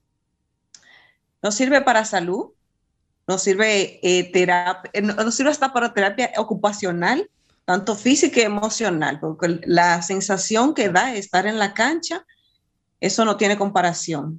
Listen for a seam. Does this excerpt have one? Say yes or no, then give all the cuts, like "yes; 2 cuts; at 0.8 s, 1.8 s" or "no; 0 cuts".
no; 0 cuts